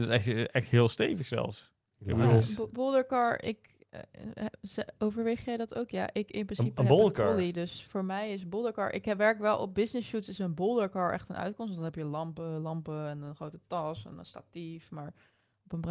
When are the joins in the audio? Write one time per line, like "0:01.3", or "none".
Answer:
none